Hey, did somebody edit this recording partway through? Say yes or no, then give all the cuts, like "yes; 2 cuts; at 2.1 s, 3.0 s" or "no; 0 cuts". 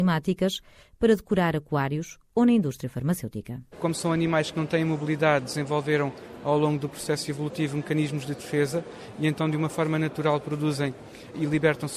no; 0 cuts